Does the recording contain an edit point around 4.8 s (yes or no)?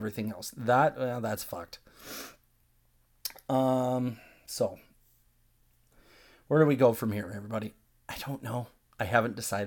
no